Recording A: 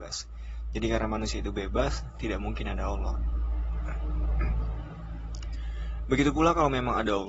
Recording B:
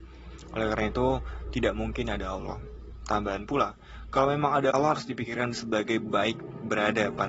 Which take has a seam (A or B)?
B